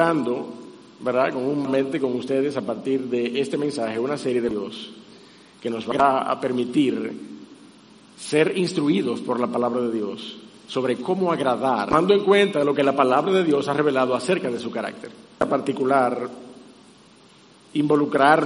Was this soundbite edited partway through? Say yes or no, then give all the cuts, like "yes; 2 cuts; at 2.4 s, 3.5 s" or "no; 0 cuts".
no; 0 cuts